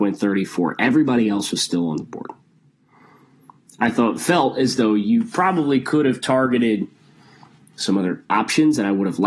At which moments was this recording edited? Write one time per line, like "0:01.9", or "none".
none